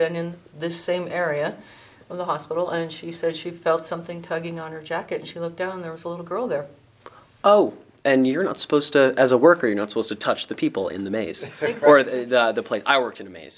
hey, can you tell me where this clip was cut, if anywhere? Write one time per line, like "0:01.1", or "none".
none